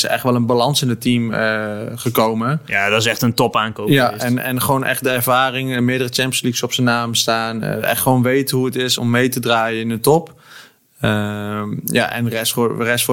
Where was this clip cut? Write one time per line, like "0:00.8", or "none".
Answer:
0:09.0